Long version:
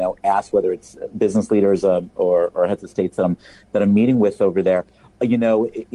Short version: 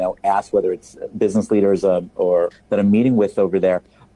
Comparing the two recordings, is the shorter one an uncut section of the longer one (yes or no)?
no